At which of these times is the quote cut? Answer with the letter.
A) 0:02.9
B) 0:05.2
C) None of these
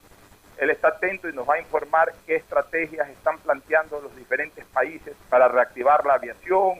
B